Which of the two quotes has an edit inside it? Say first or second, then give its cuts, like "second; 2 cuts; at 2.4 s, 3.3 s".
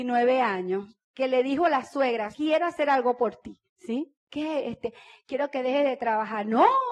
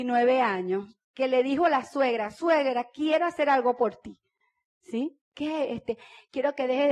first; 2 cuts; at 2.3 s, 3.7 s